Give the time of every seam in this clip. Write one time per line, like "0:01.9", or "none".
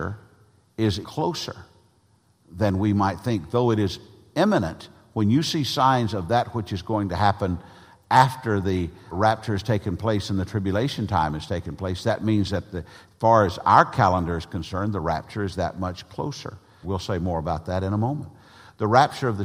0:01.0
0:09.1
0:16.8